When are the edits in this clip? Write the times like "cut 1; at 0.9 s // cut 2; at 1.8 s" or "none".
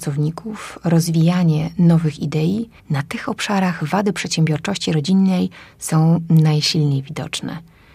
cut 1; at 2.8 s